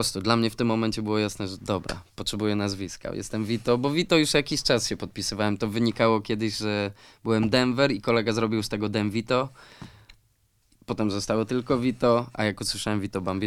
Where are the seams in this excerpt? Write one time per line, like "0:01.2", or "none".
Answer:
none